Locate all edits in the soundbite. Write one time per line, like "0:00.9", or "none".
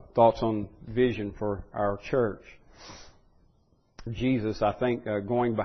0:04.1